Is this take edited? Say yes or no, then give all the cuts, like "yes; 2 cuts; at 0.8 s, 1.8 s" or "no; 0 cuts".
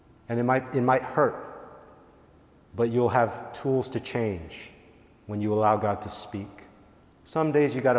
yes; 1 cut; at 7.0 s